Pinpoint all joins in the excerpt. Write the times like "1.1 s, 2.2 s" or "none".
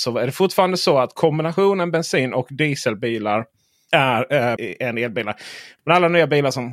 4.6 s, 5.8 s